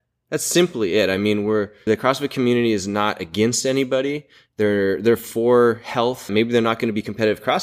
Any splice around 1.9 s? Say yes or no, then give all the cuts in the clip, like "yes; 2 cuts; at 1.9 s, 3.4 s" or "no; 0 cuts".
yes; 2 cuts; at 1.9 s, 6.3 s